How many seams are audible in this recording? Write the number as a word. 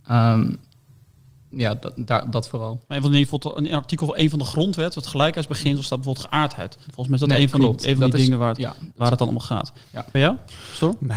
one